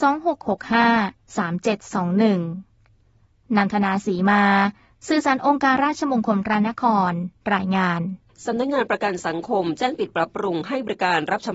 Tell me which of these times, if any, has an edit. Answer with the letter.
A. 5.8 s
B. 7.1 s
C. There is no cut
A